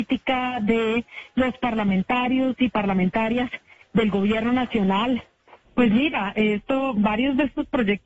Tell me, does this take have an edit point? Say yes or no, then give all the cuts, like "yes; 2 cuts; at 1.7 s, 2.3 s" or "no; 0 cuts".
yes; 1 cut; at 5.6 s